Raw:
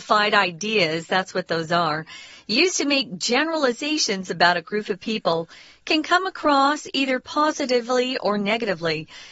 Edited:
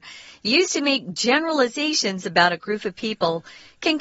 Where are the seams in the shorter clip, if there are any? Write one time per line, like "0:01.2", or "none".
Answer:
none

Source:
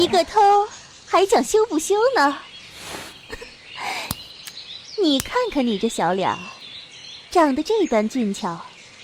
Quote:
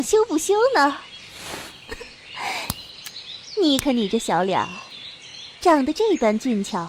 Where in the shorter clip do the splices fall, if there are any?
0:03.8

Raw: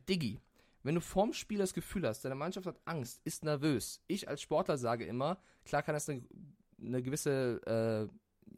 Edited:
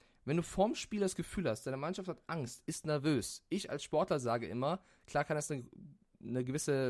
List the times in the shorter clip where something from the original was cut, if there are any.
none

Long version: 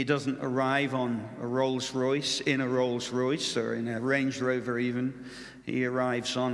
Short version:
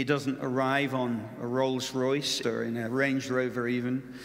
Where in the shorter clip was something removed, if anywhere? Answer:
0:02.4

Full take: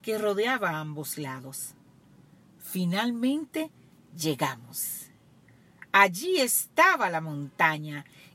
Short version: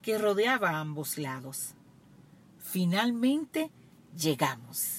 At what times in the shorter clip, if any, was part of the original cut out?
none

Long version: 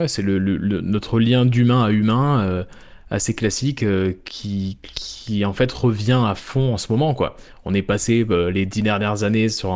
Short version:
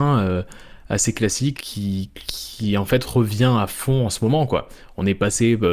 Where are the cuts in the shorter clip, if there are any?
0:01.5

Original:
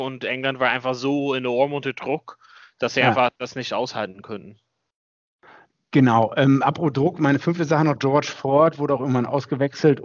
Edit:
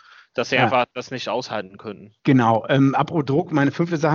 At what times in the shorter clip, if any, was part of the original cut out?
0:02.2

